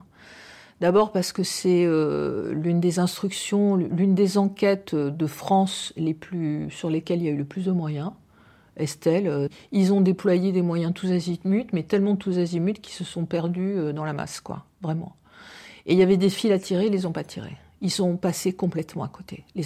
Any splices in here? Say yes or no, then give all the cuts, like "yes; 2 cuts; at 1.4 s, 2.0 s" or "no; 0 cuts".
no; 0 cuts